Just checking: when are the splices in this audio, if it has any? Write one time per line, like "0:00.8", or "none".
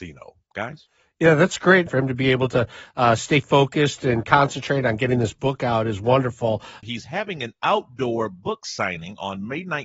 0:01.9
0:06.8